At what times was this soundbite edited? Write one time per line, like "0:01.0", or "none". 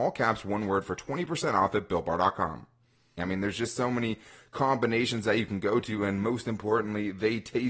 0:03.2

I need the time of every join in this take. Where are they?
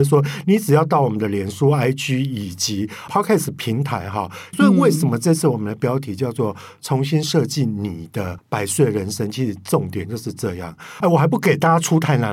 0:04.5
0:11.0

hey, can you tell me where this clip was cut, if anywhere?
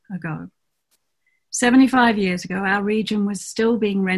none

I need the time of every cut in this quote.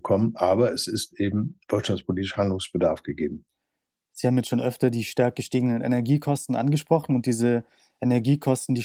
none

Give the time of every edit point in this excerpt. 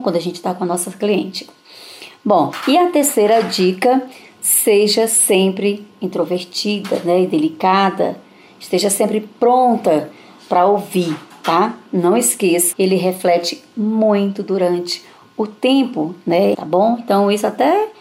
0:12.7
0:16.5

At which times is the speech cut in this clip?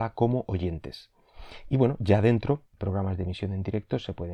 0:02.8

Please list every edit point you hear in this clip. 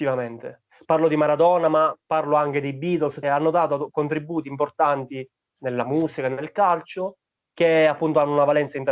0:03.2

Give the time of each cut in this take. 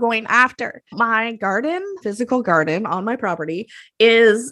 0:00.9
0:02.0

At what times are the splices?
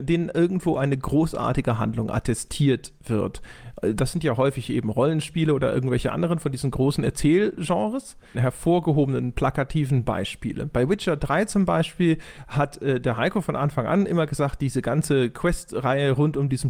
0:08.3

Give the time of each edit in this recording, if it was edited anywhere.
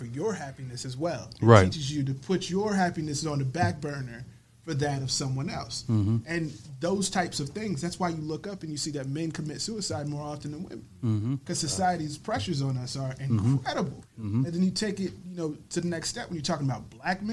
none

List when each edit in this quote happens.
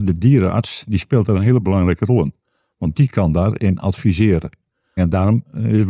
0:05.0

